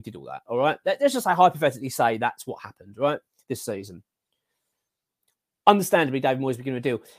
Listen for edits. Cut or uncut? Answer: uncut